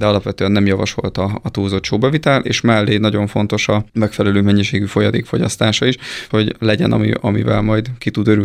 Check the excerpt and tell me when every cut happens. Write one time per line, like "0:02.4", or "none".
0:03.9
0:06.3